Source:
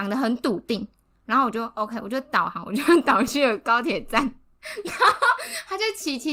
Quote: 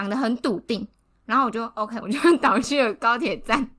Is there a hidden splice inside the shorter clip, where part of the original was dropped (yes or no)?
yes